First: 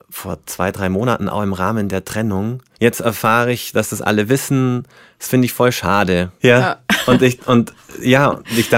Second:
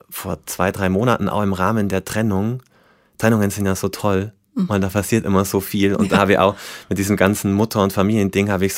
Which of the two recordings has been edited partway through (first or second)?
first